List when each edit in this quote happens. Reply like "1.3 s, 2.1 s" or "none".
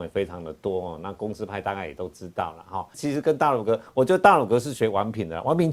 2.9 s